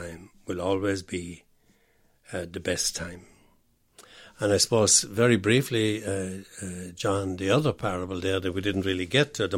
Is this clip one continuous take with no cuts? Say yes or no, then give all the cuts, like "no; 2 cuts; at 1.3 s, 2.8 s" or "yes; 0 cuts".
yes; 0 cuts